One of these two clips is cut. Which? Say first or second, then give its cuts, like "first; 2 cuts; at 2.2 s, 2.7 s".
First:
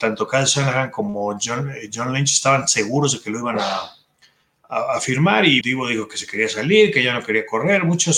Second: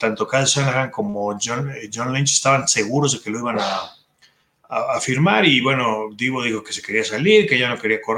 first; 1 cut; at 5.6 s